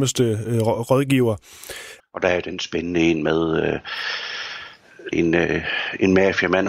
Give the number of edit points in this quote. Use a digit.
2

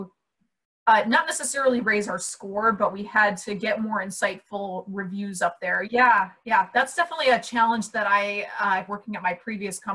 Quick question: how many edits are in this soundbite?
2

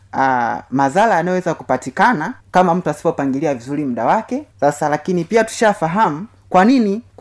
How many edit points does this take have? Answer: 2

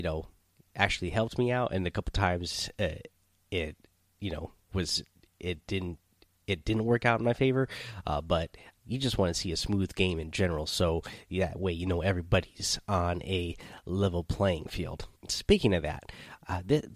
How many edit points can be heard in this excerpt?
2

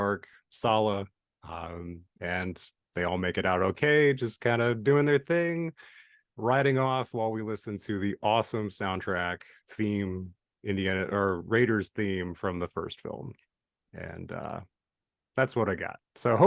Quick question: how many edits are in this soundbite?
0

